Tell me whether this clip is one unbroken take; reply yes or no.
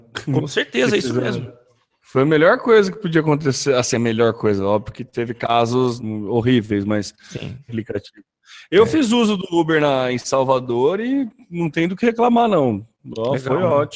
no